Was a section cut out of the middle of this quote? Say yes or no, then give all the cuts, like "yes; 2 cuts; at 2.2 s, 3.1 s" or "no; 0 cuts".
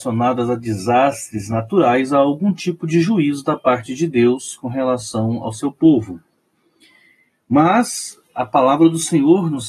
no; 0 cuts